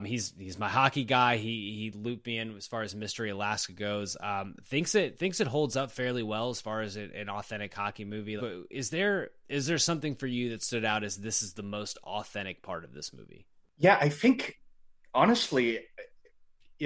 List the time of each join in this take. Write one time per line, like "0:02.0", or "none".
0:08.4
0:14.0